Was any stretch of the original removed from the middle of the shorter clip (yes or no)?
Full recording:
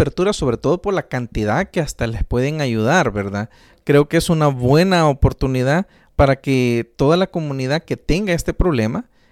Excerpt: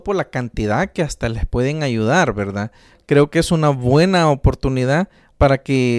no